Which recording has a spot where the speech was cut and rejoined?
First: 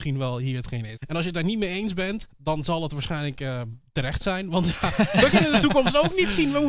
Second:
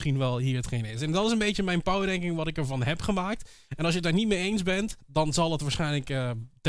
first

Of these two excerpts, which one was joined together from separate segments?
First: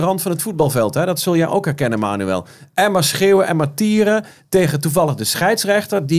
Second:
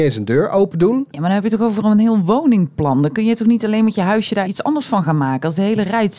second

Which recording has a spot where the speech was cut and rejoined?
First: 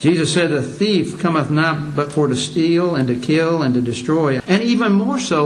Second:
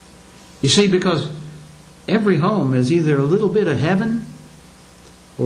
first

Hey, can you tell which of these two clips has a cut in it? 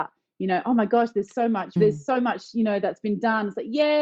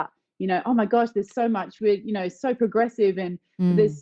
first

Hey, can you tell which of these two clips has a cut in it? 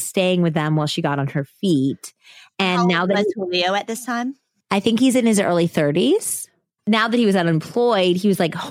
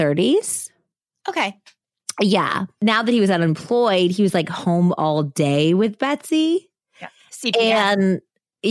first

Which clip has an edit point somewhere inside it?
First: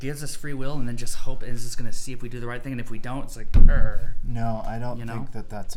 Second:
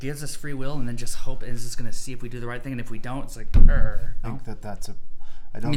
second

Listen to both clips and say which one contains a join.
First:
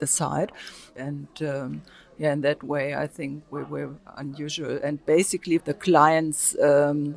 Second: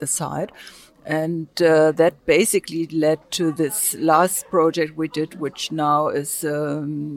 first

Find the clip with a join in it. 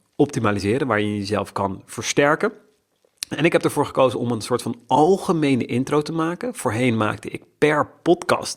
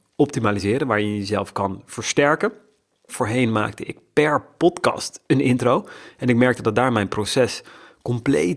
second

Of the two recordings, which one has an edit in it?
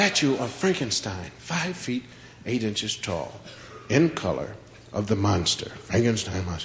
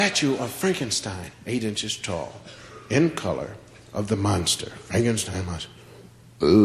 second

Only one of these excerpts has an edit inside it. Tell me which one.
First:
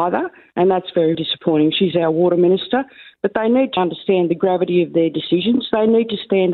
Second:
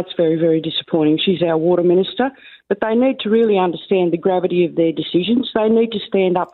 first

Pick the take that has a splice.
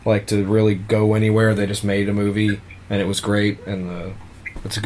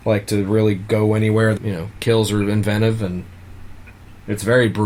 second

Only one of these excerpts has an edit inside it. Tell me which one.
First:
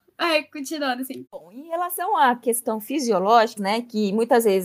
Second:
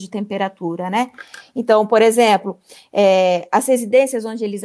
first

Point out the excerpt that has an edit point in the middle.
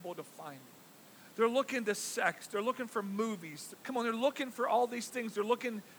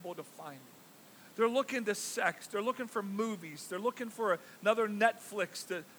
first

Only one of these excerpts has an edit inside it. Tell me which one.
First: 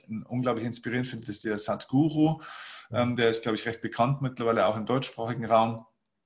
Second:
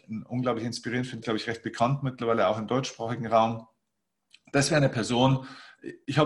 second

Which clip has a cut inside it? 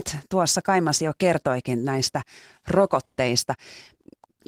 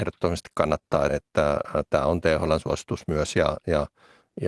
second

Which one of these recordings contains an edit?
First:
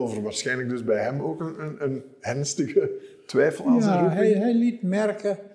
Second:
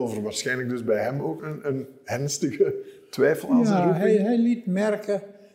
second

